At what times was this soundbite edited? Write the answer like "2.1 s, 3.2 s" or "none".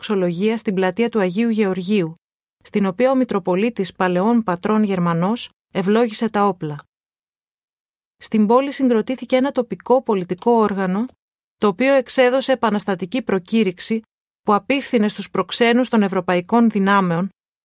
11.4 s